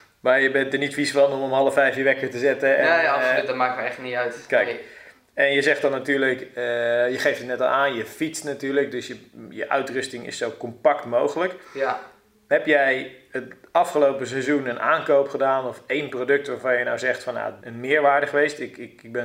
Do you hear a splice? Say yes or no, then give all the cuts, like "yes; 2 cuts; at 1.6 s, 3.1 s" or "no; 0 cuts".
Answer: yes; 1 cut; at 17.6 s